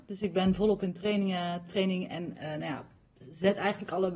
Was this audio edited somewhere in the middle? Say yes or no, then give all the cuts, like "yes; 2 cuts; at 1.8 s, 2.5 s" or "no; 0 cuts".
no; 0 cuts